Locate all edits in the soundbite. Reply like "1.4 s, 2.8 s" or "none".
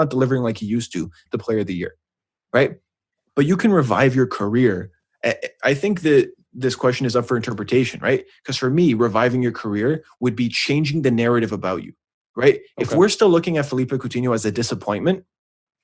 1.3 s